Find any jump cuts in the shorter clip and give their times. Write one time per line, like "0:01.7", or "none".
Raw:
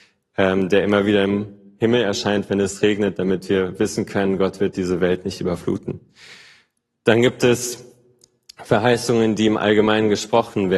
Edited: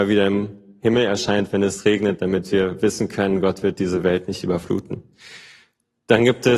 none